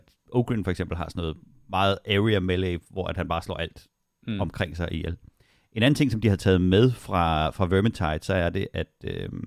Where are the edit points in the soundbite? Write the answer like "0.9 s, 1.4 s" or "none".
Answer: none

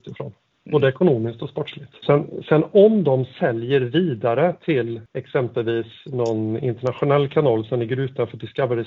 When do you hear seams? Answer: 2.0 s

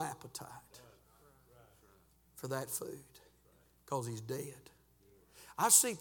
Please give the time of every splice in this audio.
none

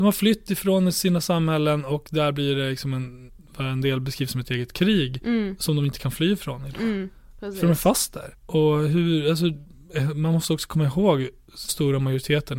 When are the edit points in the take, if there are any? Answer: 8.3 s, 11.7 s

